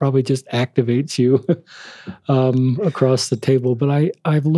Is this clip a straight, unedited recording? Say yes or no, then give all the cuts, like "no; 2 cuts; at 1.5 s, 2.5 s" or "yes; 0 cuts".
yes; 0 cuts